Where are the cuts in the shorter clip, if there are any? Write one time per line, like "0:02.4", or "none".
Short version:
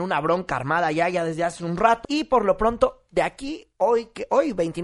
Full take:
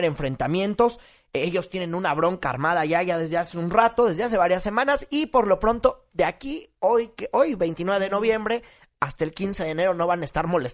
0:02.0